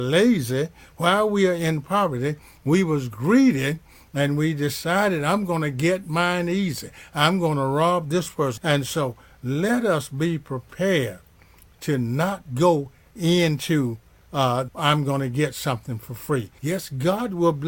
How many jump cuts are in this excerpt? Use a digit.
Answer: 3